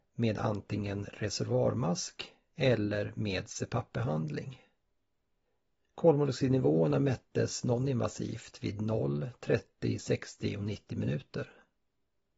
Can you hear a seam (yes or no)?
yes